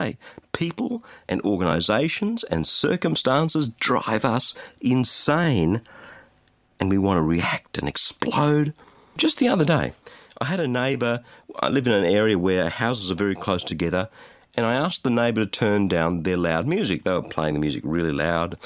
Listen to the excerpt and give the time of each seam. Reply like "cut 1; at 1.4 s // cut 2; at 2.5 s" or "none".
none